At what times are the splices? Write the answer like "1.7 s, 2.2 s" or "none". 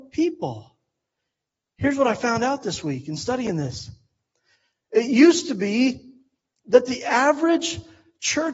none